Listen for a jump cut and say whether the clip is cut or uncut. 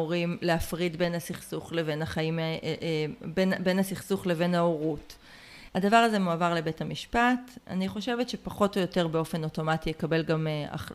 cut